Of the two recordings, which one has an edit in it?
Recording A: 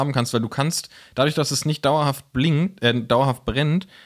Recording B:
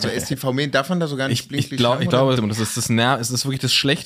B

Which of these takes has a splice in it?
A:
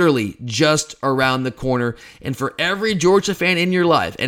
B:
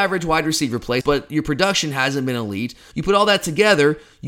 B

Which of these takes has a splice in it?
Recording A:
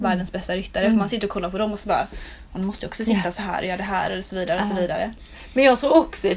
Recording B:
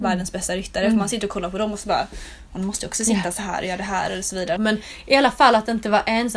B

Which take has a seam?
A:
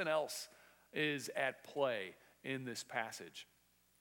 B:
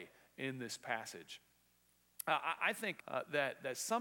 B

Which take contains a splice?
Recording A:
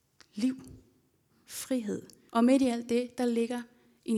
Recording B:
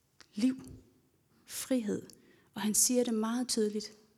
A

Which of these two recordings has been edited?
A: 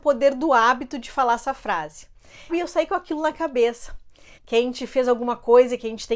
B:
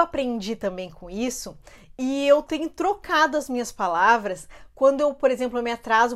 A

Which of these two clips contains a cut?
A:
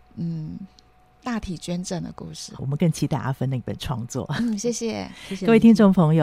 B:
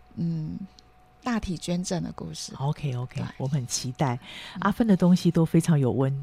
A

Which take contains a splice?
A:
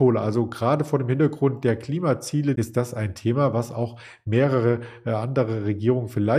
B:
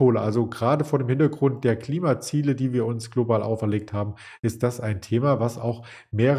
A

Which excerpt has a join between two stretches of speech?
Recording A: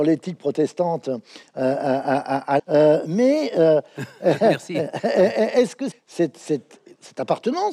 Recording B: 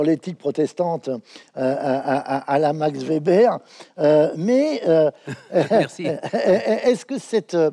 A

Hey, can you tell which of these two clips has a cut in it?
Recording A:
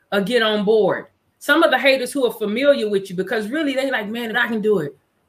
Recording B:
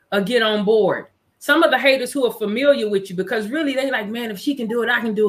A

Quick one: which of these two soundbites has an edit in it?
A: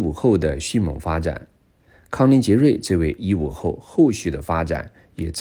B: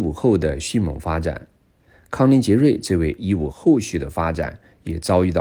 B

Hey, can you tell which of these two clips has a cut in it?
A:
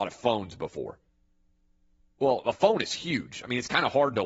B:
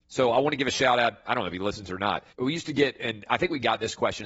B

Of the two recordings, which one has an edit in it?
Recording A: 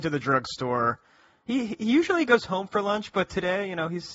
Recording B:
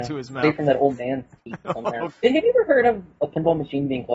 B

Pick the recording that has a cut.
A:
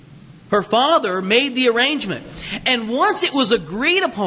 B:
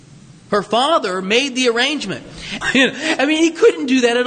B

